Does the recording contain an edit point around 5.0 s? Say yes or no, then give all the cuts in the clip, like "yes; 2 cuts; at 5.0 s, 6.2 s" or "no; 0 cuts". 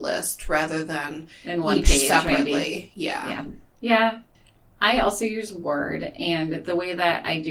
no; 0 cuts